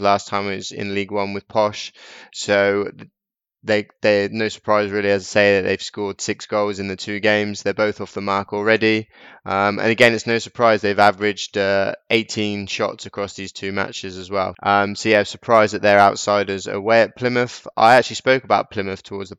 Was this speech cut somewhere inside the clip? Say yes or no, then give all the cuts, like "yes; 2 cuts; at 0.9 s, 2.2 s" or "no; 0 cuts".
yes; 1 cut; at 14.5 s